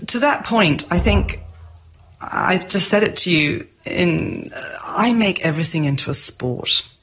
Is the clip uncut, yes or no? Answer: yes